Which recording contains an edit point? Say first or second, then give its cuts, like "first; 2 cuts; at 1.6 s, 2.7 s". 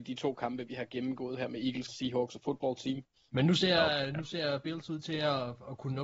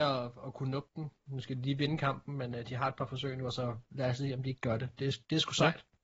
first; 2 cuts; at 1.9 s, 3.3 s